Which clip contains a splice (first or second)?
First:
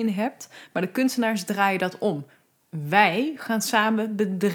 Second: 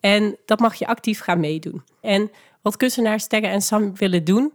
second